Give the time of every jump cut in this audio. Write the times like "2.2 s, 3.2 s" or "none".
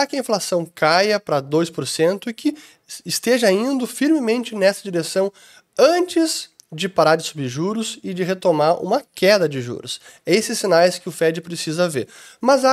none